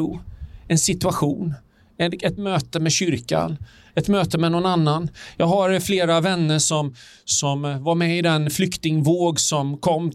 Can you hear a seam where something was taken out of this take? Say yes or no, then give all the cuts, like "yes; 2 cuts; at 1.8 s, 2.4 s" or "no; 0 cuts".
no; 0 cuts